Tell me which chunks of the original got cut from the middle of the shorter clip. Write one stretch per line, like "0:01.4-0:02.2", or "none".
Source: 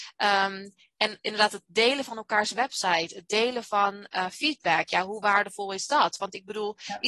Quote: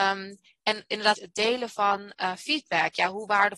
0:01.5-0:03.1